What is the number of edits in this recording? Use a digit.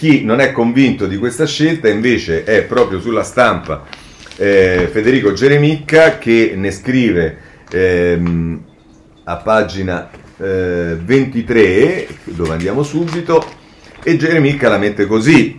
1